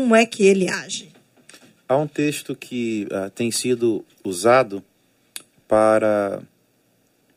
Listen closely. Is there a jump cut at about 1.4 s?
no; 0 cuts

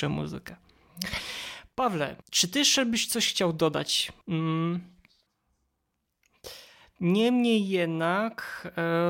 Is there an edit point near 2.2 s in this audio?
yes; 2 cuts; at 2.2 s, 4.2 s

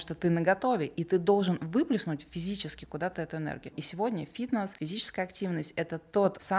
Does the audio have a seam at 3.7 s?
yes; 1 cut; at 3.7 s

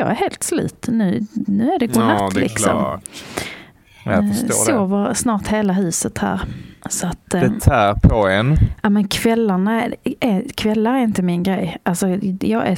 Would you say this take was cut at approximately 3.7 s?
no; 0 cuts

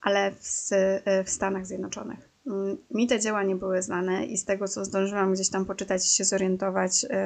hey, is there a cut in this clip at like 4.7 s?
no; 0 cuts

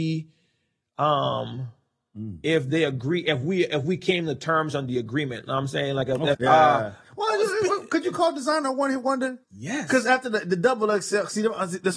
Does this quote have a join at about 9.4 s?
yes; 2 cuts; at 6.3 s, 9.4 s

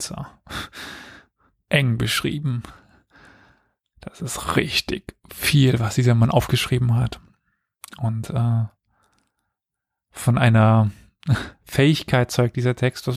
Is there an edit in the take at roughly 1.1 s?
no; 0 cuts

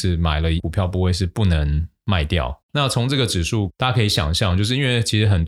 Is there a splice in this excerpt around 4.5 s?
no; 1 cut; at 2.6 s

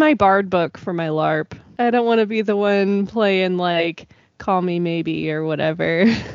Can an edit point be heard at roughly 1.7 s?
yes; 1 cut; at 1.7 s

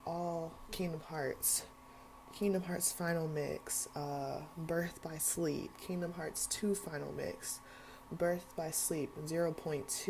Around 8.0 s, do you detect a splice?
no; 0 cuts

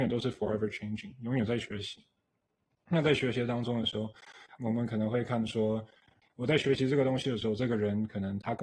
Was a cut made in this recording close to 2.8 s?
no; 1 cut; at 4.6 s

